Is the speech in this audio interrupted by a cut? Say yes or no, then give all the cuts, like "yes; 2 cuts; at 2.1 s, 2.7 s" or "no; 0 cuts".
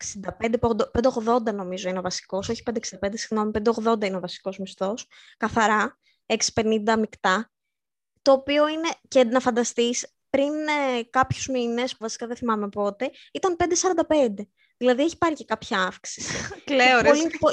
yes; 1 cut; at 12.0 s